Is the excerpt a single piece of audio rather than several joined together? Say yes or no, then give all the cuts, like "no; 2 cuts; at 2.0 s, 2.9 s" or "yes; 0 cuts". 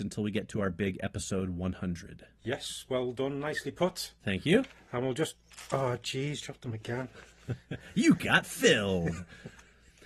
yes; 0 cuts